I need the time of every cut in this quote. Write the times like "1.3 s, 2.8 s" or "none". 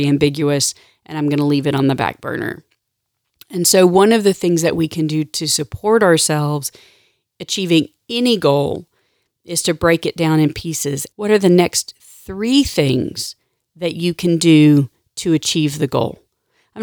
11.1 s